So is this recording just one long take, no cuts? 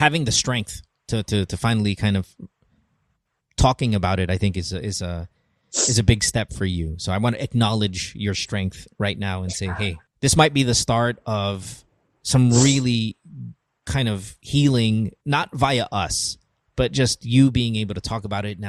no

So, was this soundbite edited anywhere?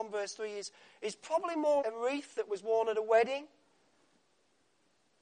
yes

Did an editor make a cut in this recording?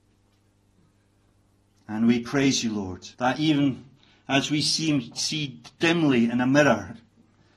yes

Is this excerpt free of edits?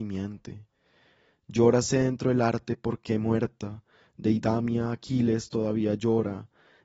yes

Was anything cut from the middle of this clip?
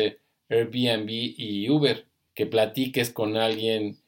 yes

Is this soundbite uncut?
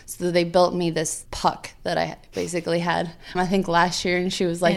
no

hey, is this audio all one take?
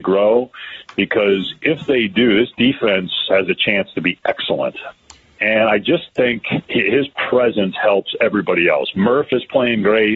no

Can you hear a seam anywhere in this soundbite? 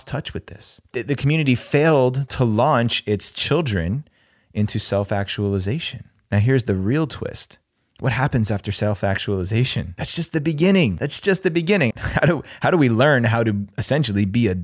yes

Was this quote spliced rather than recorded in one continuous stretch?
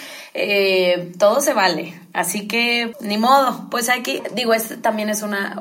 yes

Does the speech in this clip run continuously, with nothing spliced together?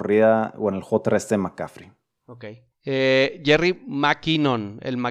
yes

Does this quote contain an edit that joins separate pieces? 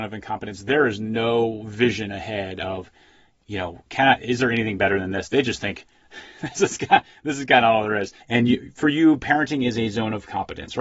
yes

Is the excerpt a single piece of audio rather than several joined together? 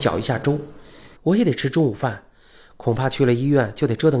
no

